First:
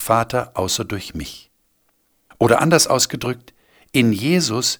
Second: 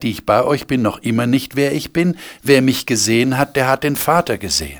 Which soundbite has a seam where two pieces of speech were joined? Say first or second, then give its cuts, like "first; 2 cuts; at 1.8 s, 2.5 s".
first; 1 cut; at 2.3 s